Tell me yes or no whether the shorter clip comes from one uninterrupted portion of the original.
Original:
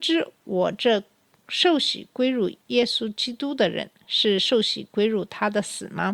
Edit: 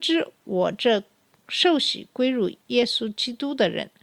yes